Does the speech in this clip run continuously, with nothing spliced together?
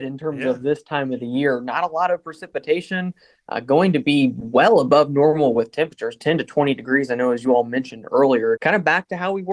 no; 1 cut; at 8.6 s

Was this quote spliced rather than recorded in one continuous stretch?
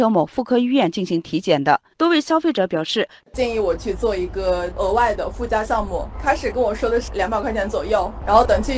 yes; 2 cuts; at 1.9 s, 3.2 s

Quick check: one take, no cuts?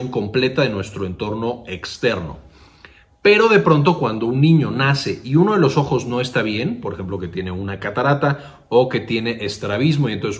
yes; 0 cuts

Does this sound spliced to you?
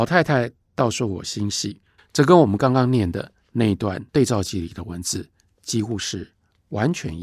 yes; 2 cuts; at 2.0 s, 4.1 s

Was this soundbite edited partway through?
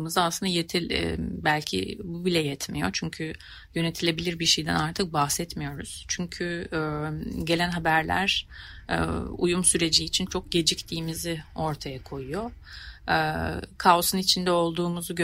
yes; 1 cut; at 10.3 s

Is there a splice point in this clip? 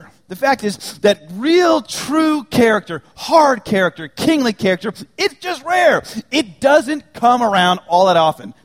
no; 0 cuts

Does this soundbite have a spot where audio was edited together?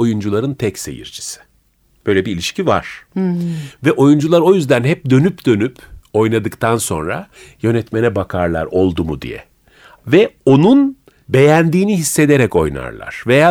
no; 0 cuts

